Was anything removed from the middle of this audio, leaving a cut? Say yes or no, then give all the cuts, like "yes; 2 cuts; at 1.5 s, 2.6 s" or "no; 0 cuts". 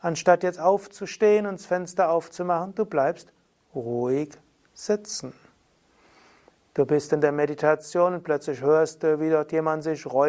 no; 0 cuts